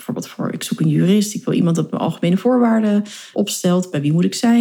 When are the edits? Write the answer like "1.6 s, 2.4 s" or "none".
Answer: 3.3 s